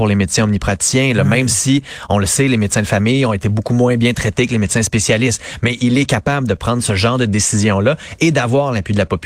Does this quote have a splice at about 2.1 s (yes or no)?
no